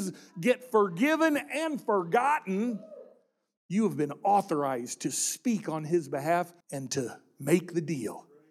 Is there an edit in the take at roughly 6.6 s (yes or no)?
yes